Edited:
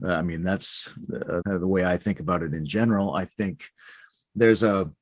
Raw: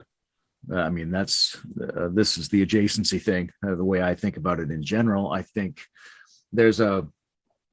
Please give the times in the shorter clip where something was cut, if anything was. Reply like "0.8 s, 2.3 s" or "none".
1.4 s